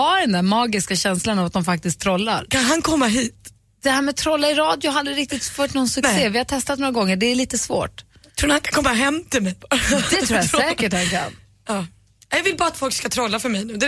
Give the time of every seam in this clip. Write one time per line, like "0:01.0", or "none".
0:02.5